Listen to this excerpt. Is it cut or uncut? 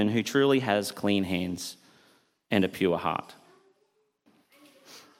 uncut